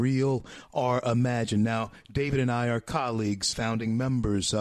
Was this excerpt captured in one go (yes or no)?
no